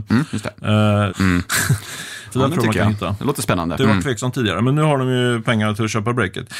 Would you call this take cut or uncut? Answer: cut